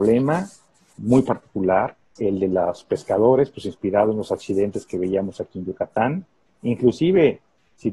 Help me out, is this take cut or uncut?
cut